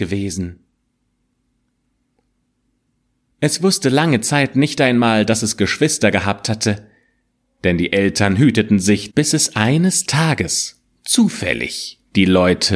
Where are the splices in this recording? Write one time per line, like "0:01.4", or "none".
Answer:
0:03.3
0:09.1

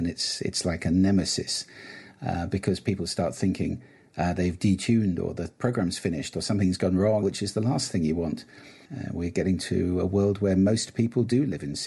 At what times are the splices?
0:07.2
0:08.8

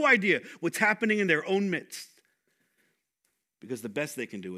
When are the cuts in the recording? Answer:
none

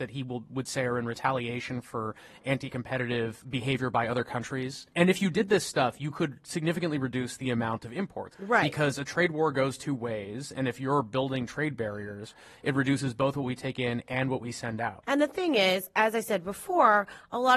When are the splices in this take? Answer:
0:08.3

